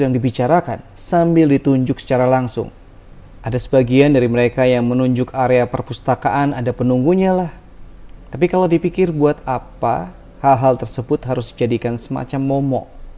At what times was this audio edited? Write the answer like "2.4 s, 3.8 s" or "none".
3.4 s, 8.2 s